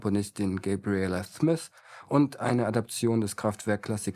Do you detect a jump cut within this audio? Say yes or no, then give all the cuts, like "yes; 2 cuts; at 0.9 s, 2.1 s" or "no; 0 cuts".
no; 0 cuts